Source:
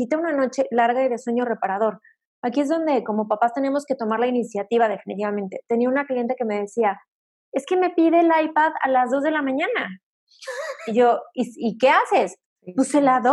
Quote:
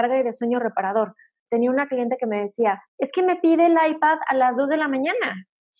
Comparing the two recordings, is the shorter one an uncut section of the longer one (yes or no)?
no